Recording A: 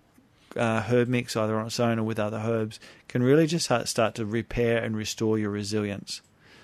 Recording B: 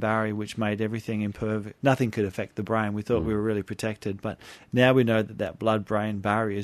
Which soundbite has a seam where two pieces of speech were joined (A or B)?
B